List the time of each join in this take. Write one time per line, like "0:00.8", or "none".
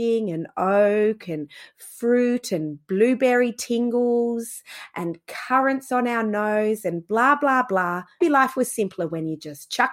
0:08.2